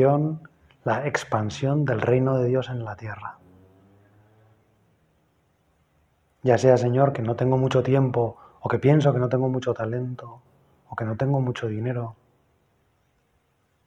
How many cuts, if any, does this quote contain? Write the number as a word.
zero